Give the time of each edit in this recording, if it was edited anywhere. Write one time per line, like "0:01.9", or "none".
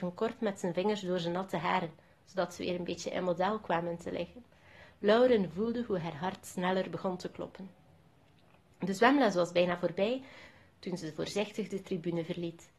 none

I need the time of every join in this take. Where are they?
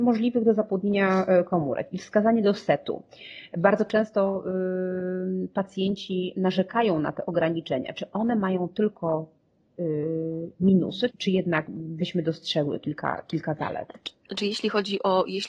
0:11.1

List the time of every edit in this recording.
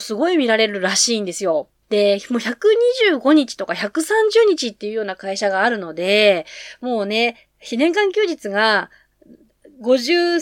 0:01.8

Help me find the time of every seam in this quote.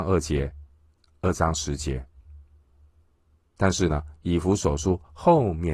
none

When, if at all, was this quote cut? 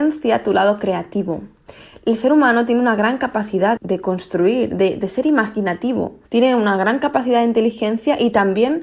0:03.8
0:06.2

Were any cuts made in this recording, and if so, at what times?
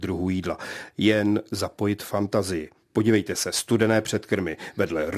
none

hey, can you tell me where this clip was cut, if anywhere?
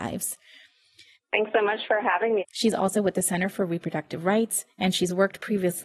0:01.1
0:02.4

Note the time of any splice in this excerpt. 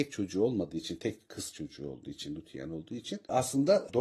none

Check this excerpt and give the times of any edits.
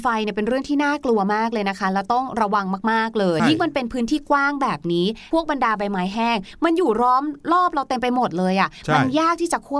0:03.4

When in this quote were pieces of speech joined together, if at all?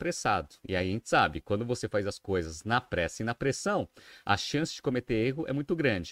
none

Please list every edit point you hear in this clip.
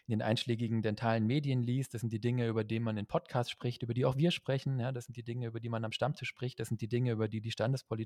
none

